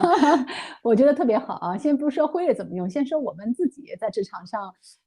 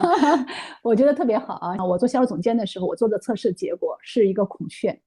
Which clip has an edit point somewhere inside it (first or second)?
second